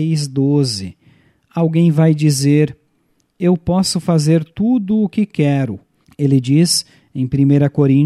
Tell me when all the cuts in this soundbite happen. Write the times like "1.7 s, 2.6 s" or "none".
6.0 s